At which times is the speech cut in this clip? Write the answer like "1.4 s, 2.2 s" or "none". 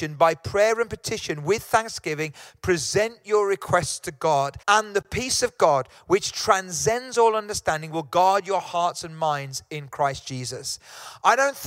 4.6 s